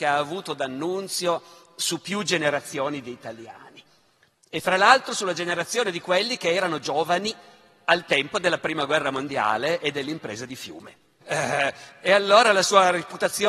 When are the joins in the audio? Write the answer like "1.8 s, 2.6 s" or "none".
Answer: 11.2 s